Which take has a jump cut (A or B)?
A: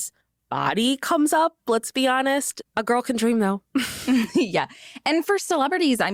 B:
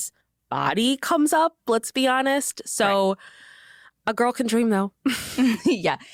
A